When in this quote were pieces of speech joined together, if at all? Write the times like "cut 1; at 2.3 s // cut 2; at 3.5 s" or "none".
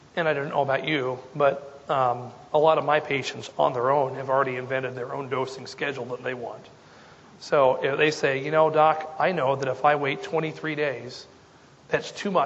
none